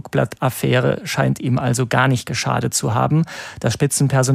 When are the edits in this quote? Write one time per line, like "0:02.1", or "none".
none